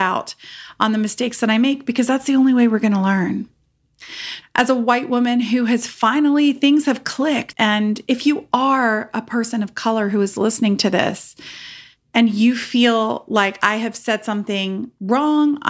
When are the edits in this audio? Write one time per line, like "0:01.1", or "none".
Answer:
0:04.4
0:07.5